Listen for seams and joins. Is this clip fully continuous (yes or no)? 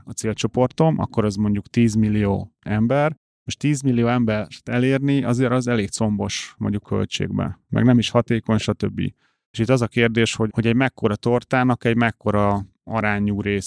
no